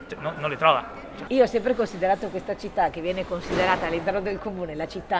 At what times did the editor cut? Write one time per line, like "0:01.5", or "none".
0:01.3